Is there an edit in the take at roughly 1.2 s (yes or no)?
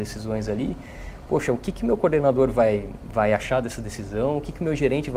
no